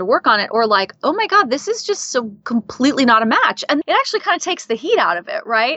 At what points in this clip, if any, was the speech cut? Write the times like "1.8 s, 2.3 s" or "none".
3.8 s